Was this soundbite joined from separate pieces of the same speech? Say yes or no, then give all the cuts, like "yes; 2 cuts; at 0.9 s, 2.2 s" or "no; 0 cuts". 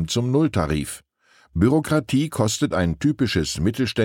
no; 0 cuts